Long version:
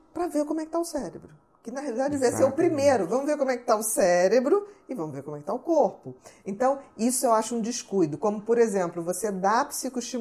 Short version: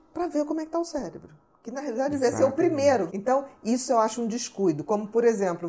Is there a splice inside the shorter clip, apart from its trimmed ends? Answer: yes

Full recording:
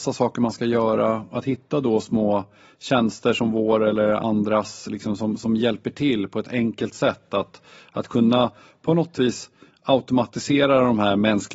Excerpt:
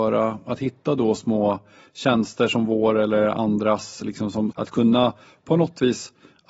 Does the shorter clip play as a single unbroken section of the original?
no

